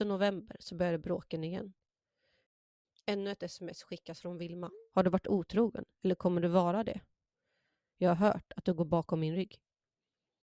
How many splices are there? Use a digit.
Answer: 0